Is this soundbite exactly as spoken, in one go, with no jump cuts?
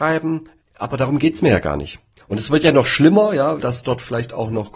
no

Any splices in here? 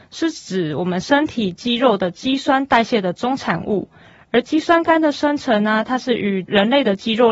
no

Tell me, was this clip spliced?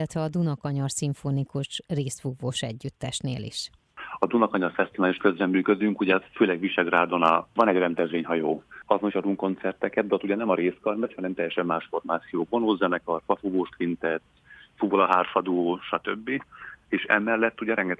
no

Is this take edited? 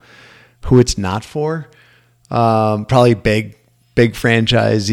no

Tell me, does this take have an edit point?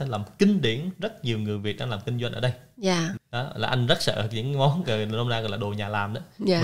yes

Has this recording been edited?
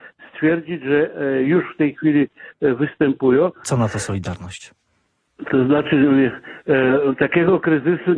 yes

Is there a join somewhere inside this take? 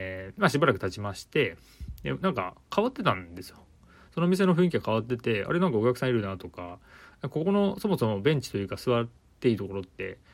no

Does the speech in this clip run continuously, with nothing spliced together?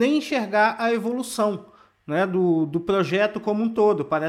yes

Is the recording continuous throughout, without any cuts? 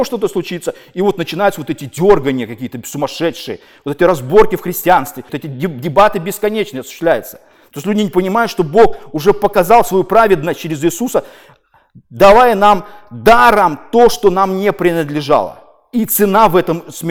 no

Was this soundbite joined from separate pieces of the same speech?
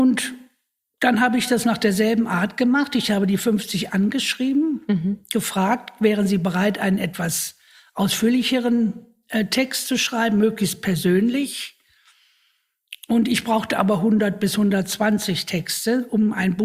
no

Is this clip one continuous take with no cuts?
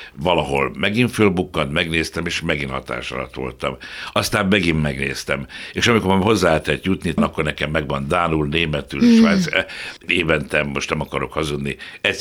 yes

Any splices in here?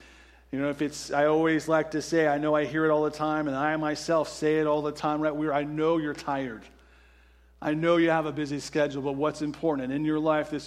no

